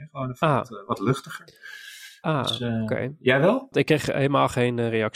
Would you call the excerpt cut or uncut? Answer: cut